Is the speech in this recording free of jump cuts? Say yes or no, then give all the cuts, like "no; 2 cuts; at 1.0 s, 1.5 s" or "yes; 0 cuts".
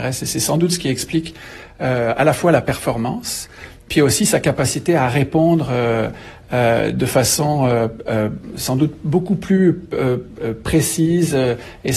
yes; 0 cuts